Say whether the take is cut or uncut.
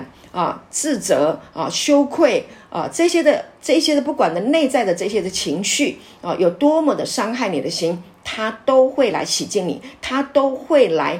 uncut